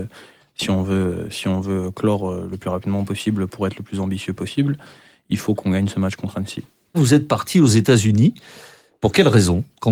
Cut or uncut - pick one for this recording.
cut